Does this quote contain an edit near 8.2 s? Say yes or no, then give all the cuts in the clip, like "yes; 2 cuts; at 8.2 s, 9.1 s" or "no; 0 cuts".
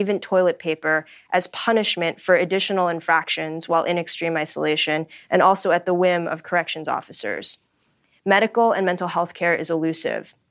no; 0 cuts